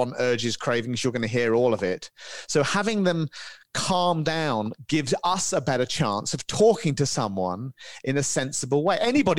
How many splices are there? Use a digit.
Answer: 0